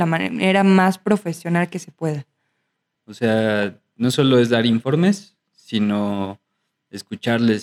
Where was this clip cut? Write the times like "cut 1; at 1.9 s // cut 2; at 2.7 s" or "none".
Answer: cut 1; at 2.9 s